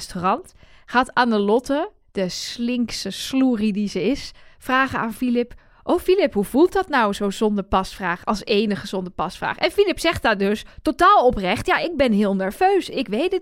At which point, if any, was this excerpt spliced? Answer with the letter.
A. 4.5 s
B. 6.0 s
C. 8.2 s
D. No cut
D